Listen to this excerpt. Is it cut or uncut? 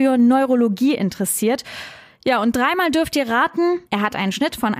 cut